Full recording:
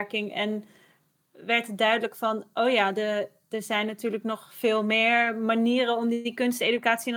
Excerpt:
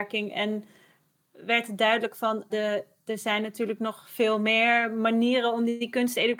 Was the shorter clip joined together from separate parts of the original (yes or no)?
yes